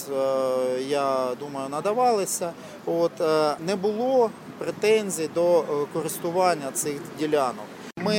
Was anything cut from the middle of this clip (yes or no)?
yes